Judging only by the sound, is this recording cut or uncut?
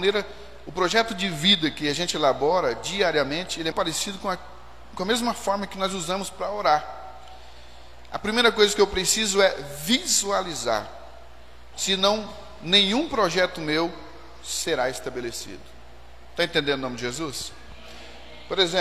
cut